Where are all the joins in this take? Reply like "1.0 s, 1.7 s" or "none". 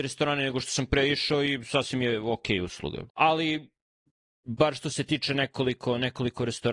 3.1 s